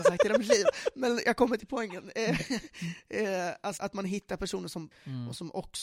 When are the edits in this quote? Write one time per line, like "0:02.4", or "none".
0:03.8
0:04.9